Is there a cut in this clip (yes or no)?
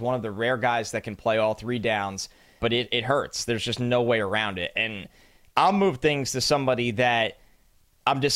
yes